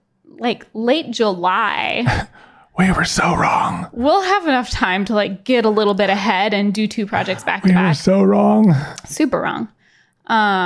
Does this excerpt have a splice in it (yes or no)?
no